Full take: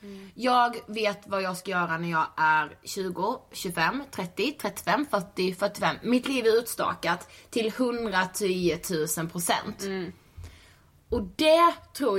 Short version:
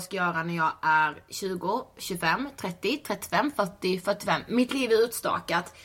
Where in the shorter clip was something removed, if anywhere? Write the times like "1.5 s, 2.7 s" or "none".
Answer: none